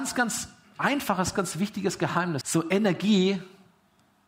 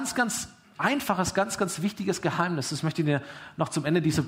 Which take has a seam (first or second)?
first